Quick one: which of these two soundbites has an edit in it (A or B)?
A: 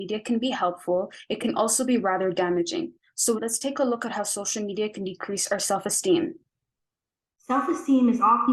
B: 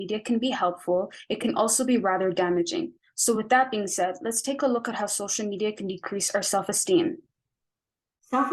A